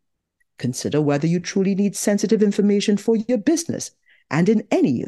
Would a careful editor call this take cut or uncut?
uncut